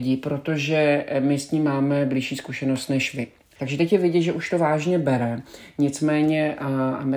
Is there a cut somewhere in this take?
yes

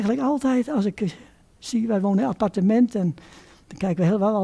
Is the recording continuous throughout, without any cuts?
yes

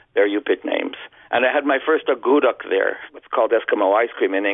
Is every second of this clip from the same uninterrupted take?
yes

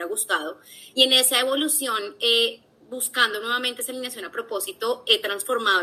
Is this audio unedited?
yes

